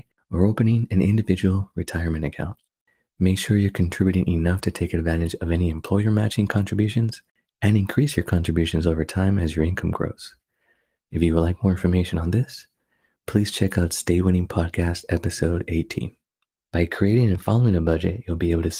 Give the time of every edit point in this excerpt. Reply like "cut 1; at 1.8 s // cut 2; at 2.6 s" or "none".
cut 1; at 16.6 s